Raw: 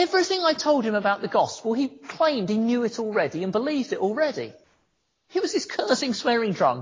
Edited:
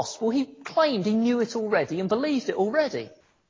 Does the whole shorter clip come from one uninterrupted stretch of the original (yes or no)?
yes